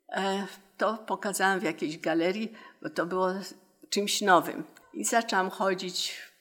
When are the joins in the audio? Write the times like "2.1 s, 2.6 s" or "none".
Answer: 4.8 s